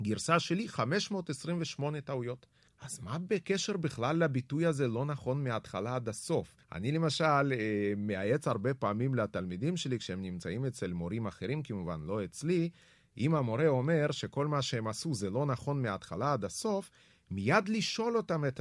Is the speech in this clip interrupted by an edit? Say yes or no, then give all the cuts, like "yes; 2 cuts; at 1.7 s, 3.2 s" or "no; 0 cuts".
yes; 2 cuts; at 2.7 s, 6.6 s